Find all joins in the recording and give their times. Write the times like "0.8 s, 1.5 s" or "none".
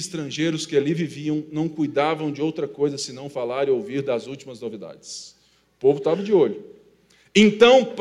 none